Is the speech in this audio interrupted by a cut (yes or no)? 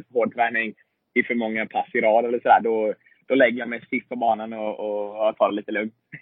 no